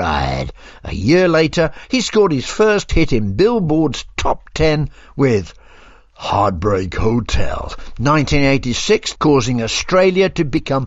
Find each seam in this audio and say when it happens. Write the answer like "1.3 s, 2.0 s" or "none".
9.1 s